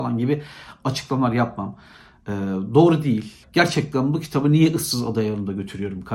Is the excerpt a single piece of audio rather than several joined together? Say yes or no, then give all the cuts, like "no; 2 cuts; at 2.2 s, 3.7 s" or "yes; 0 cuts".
no; 1 cut; at 3.4 s